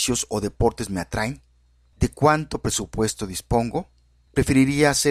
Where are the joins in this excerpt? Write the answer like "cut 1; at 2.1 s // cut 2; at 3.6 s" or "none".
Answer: cut 1; at 1.9 s